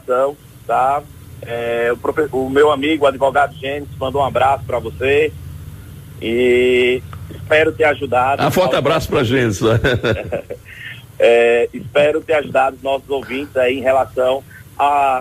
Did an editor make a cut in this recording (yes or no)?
no